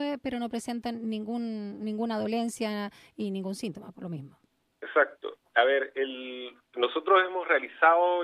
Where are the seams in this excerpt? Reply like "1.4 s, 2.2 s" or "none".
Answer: 6.6 s